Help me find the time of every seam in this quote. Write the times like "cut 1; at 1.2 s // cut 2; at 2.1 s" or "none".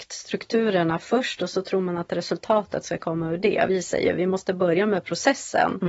none